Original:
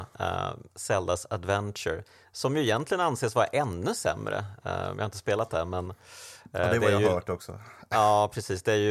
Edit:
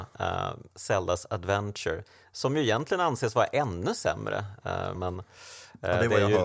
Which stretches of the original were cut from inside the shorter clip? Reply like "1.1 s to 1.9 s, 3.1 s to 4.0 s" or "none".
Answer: 4.9 s to 5.7 s